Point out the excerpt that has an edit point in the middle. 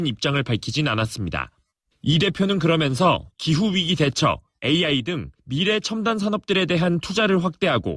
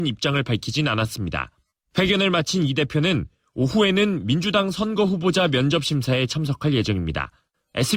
first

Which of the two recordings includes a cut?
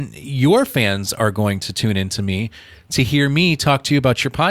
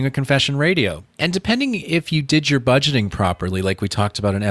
second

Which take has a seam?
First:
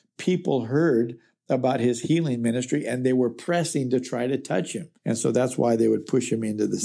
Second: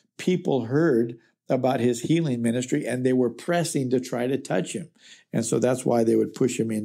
first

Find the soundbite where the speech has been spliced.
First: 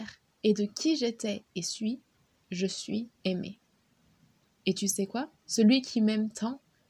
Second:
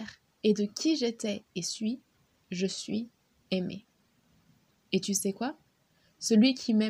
first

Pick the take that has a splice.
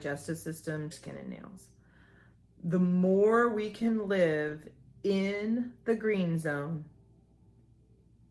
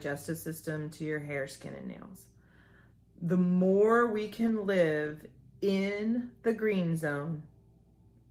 first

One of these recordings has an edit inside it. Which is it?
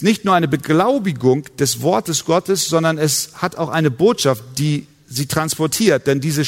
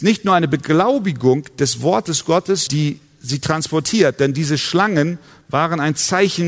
second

